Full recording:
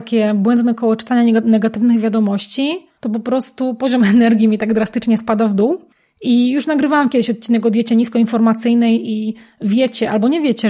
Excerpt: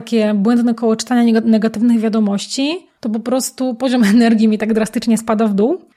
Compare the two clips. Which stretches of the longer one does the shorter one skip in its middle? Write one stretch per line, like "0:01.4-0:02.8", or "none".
none